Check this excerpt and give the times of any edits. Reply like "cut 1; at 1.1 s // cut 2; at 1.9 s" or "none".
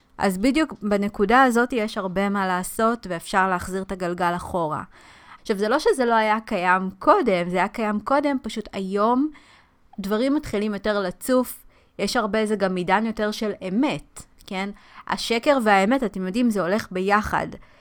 cut 1; at 5.4 s